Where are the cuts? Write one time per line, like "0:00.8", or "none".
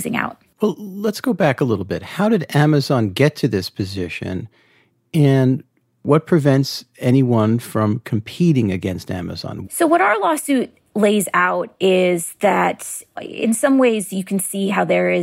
0:09.6
0:13.2